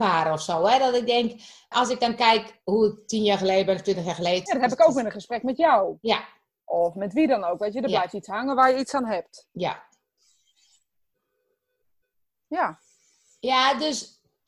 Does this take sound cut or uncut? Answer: cut